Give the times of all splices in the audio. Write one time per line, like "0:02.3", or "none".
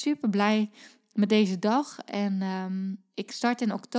none